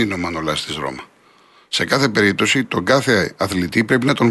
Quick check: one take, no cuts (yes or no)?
yes